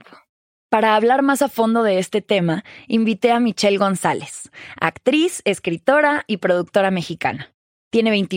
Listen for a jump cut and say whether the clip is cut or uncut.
uncut